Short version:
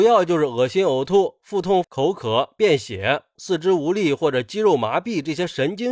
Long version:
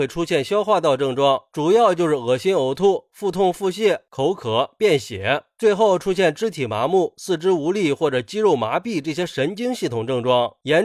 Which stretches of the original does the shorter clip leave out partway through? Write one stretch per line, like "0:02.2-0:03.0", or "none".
0:03.5-0:04.0
0:05.6-0:07.1